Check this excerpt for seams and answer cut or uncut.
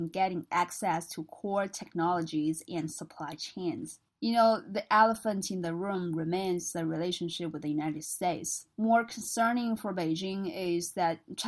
cut